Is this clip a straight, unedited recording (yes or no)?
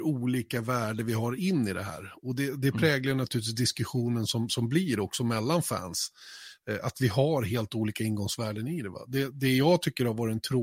yes